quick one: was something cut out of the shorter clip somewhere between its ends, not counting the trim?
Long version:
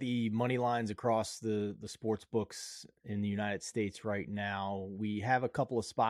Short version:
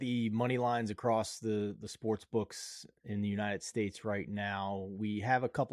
no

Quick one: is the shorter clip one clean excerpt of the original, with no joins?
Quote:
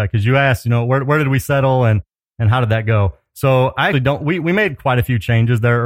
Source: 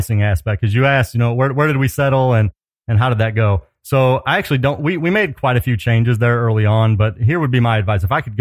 no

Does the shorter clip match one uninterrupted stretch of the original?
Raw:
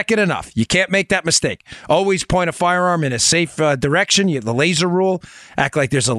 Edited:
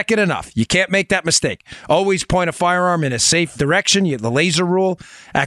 no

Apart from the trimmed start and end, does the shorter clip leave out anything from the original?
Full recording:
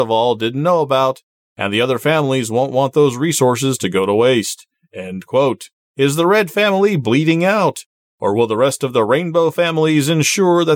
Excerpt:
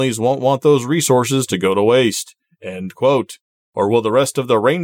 yes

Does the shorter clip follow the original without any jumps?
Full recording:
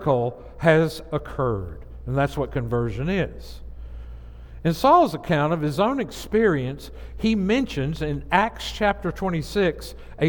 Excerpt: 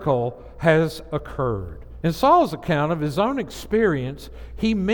no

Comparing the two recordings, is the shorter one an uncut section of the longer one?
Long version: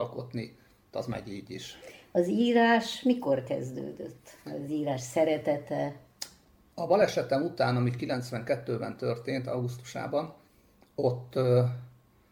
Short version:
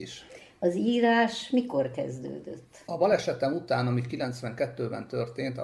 no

